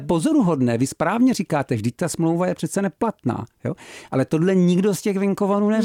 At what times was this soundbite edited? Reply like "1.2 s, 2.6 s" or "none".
none